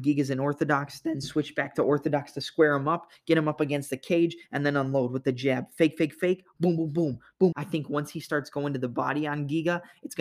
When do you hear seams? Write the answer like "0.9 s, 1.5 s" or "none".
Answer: 7.5 s